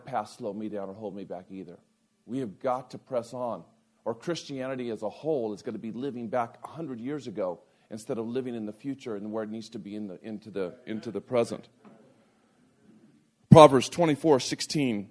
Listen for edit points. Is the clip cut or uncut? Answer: uncut